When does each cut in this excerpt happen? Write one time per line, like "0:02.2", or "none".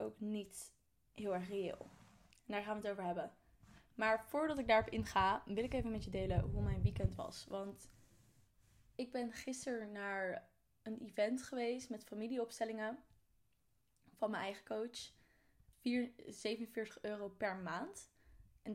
0:15.7